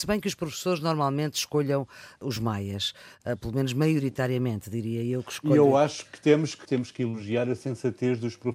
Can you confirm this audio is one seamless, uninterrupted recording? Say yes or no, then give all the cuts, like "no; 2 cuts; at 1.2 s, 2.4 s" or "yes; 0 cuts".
no; 1 cut; at 6.7 s